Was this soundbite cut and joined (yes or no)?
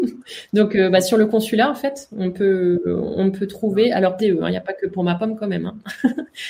yes